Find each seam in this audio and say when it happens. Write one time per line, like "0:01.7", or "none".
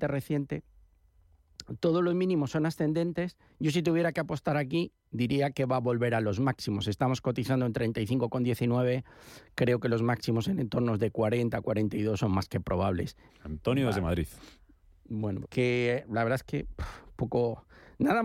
0:13.3
0:15.4